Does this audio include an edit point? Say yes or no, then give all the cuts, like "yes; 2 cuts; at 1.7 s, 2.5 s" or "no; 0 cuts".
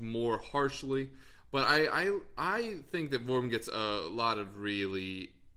no; 0 cuts